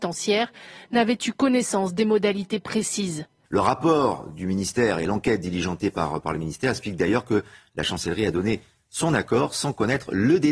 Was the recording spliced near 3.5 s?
yes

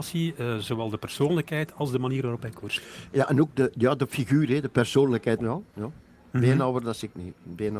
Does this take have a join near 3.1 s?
no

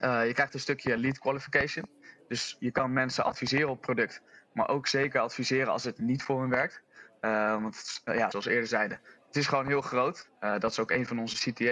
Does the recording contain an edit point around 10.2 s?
yes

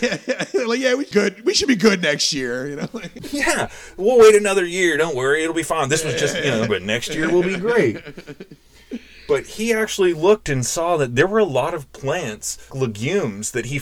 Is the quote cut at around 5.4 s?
no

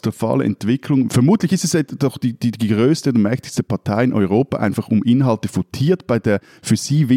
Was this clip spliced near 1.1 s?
yes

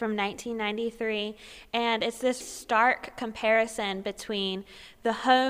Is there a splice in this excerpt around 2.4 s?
yes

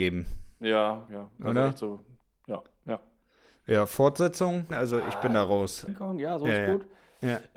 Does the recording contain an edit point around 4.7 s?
yes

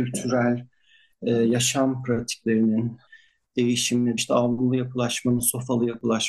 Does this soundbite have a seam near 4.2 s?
yes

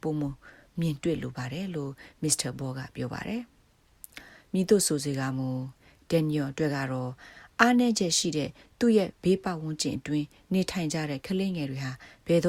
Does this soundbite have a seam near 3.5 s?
no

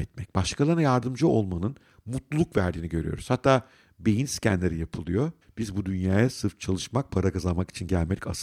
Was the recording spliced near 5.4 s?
yes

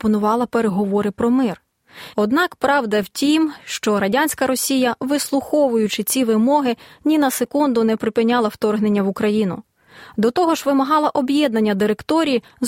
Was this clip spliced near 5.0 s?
no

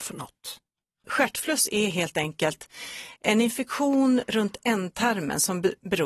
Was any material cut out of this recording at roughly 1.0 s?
no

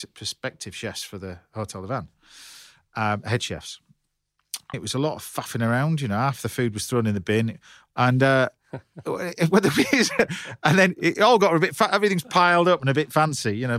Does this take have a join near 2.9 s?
no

